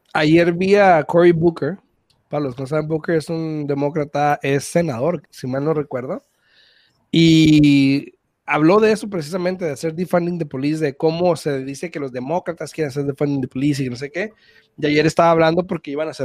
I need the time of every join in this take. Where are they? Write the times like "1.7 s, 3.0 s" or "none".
5.2 s